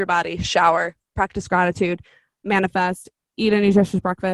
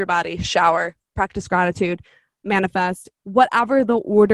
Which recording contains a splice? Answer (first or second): second